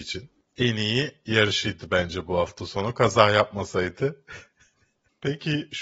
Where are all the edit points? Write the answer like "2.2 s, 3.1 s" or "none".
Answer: none